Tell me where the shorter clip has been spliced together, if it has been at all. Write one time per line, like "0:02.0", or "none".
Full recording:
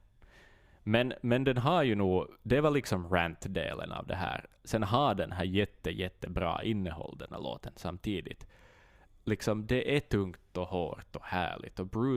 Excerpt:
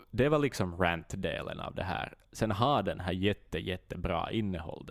none